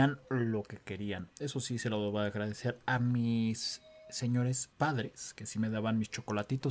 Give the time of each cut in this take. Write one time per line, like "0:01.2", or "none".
0:01.3
0:04.7